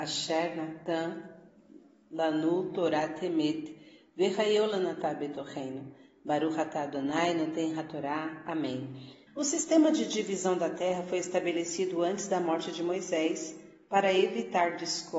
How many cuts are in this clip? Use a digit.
1